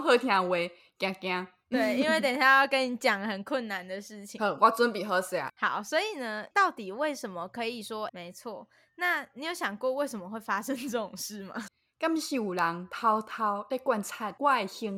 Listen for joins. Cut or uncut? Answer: cut